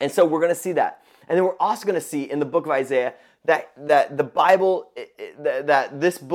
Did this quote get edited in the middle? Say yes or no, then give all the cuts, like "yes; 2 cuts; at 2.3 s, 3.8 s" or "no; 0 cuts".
no; 0 cuts